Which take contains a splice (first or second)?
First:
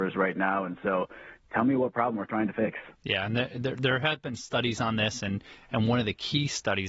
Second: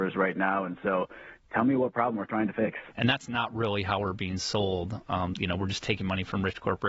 second